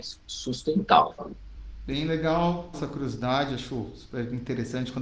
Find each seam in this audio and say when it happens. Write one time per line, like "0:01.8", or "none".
0:02.7